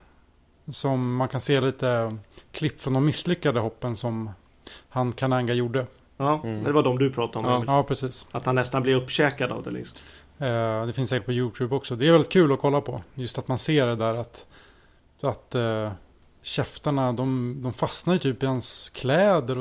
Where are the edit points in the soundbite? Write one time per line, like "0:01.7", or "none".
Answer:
none